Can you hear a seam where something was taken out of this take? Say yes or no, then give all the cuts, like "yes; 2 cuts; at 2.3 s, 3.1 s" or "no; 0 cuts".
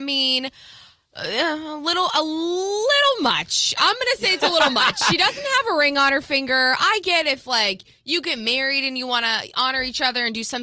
no; 0 cuts